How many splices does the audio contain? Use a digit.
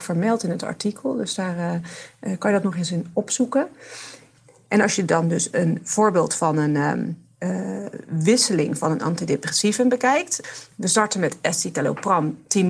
0